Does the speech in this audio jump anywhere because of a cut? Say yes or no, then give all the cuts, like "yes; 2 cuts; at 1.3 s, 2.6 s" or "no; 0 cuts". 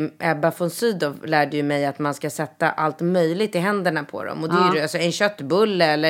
no; 0 cuts